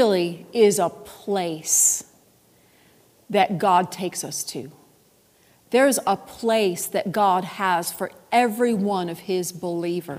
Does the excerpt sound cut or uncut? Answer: uncut